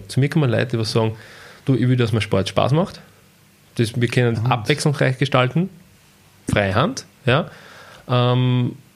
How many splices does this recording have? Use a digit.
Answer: 1